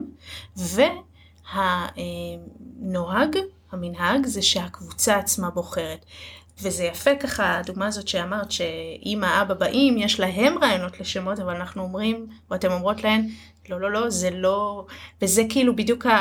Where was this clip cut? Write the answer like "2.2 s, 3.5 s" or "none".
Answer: none